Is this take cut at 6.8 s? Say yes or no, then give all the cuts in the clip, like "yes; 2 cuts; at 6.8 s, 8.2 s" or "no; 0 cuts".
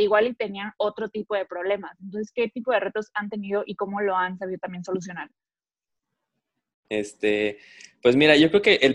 yes; 1 cut; at 6.8 s